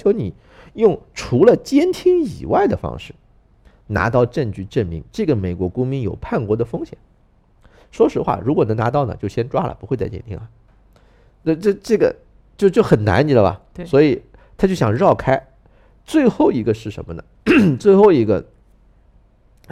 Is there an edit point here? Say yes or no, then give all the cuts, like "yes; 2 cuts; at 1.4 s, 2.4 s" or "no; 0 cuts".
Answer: no; 0 cuts